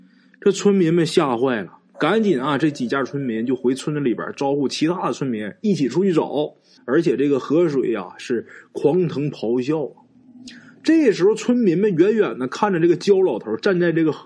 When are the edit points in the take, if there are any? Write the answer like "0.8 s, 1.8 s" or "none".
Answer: 6.8 s